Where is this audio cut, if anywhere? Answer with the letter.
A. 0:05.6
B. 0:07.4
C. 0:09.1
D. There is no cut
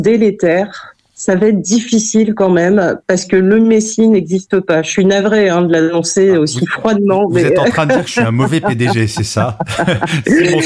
D